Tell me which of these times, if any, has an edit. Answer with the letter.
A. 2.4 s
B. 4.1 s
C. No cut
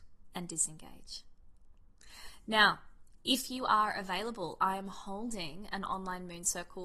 C